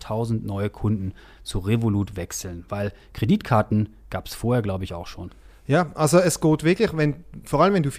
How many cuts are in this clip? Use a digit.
0